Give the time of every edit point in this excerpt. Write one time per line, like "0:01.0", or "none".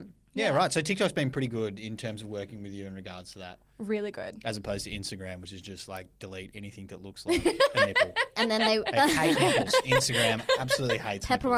none